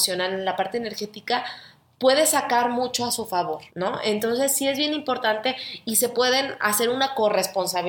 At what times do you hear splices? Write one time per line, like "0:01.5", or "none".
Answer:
0:03.7